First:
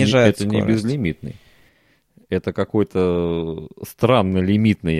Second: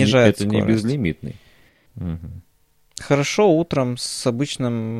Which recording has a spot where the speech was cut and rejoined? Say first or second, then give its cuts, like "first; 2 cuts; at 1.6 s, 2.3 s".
second; 1 cut; at 1.9 s